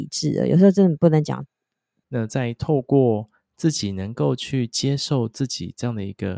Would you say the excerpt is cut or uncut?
cut